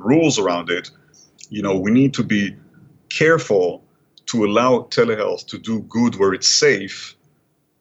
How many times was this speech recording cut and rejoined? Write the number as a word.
one